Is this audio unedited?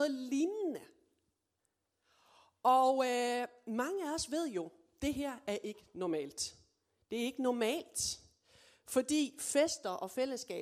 yes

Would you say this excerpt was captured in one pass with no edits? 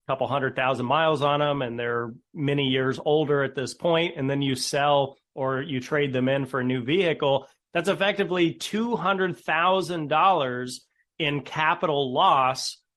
yes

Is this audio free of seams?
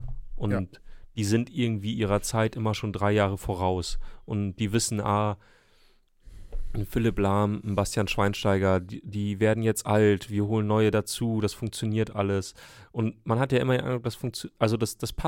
yes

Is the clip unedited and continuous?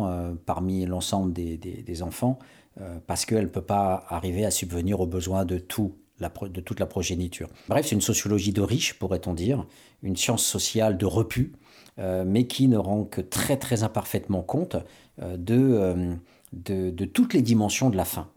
no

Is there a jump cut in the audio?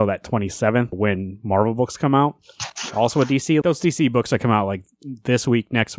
yes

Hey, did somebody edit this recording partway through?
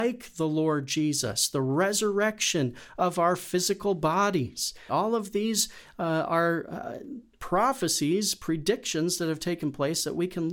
yes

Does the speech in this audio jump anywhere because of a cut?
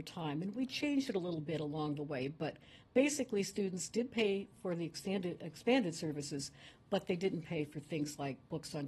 no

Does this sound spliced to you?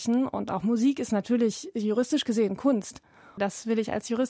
yes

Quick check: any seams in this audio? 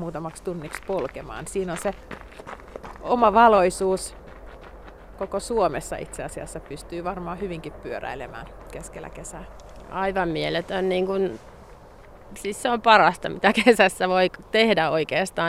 no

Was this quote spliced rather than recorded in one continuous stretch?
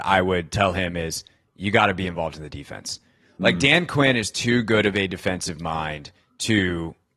no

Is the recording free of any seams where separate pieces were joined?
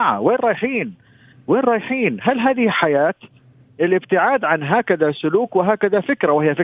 no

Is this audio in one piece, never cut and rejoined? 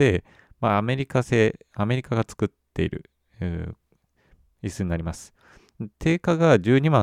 yes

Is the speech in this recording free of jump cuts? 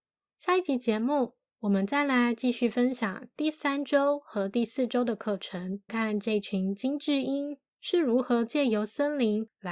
no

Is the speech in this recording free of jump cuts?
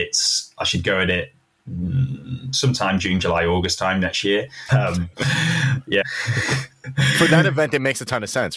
no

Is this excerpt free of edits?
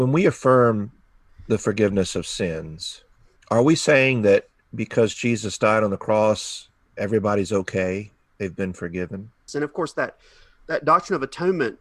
no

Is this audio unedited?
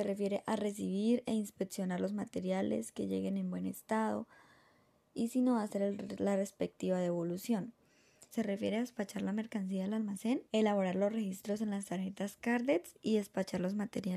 no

